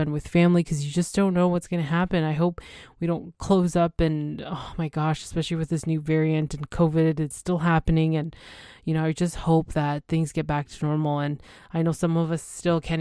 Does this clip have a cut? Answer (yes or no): no